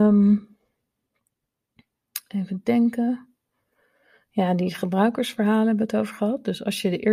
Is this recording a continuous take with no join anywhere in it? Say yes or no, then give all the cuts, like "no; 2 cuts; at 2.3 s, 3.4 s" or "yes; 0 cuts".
yes; 0 cuts